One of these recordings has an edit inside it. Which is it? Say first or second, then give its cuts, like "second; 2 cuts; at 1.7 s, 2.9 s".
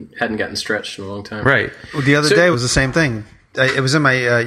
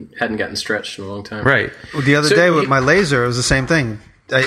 first; 1 cut; at 2.5 s